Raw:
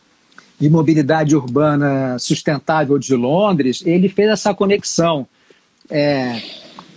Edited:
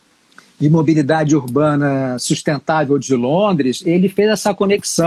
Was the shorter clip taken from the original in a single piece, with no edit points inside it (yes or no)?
yes